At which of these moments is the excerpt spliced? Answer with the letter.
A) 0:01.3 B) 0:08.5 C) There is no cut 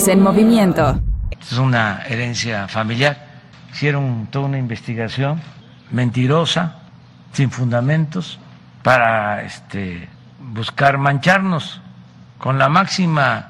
A